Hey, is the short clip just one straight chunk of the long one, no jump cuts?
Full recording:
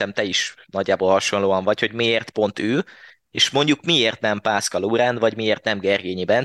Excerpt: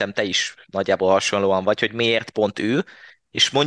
yes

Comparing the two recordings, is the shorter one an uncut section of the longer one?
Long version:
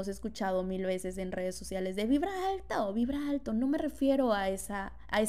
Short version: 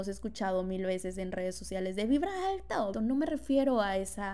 no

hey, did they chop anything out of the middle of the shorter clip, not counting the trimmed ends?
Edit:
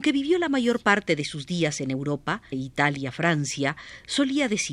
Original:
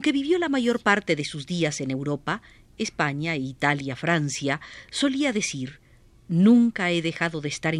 yes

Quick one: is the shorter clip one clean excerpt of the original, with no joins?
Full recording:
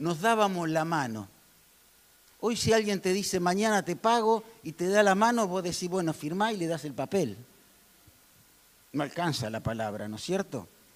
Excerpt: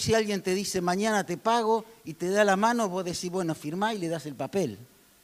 yes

